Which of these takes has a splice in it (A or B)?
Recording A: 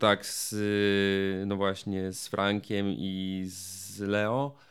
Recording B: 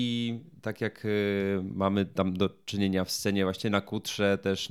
A